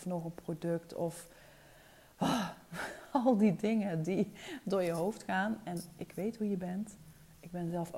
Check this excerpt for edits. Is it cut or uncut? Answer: uncut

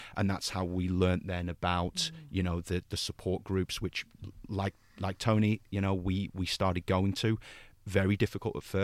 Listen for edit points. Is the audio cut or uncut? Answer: uncut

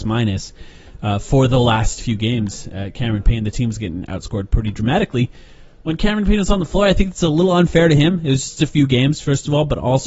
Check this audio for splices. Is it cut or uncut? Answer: uncut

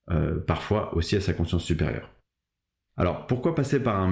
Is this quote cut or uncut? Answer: uncut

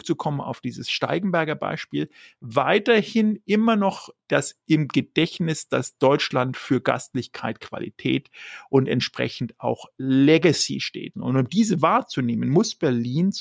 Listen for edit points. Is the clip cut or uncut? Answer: cut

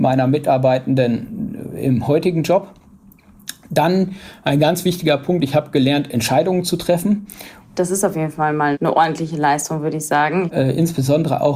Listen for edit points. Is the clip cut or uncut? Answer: cut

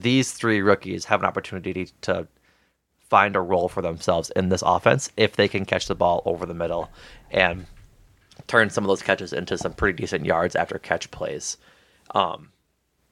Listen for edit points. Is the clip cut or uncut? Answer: uncut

